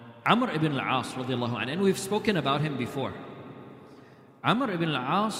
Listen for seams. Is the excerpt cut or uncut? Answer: uncut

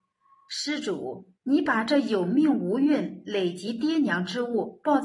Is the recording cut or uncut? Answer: cut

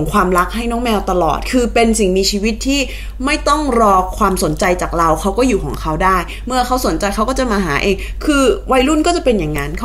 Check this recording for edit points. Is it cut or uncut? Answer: uncut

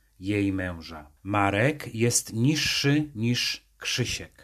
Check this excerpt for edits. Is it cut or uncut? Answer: cut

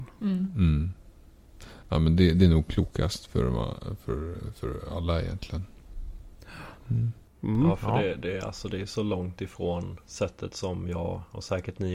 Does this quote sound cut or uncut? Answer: uncut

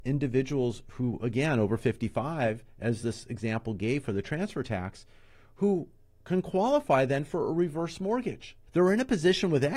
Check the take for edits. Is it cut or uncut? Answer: cut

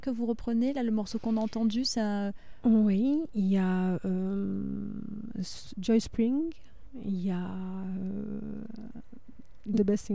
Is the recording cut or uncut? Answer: uncut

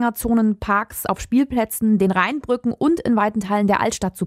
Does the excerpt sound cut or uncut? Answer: uncut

